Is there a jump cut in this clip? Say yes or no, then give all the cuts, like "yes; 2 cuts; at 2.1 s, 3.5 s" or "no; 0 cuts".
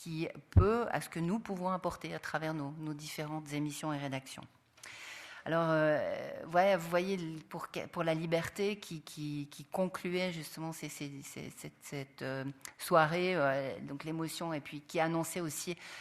no; 0 cuts